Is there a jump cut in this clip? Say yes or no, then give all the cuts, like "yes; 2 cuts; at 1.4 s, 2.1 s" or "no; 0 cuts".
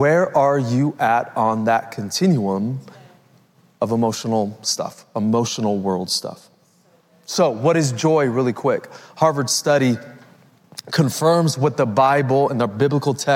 no; 0 cuts